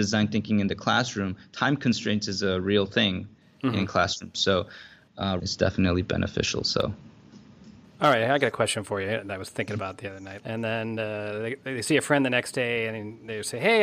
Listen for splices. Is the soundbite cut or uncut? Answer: cut